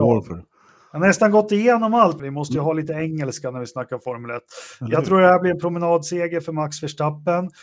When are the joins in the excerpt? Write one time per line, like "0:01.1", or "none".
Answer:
0:02.2